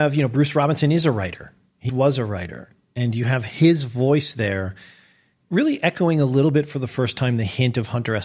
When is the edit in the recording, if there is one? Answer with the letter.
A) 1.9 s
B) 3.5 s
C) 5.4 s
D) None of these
A